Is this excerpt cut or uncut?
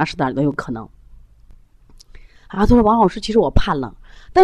uncut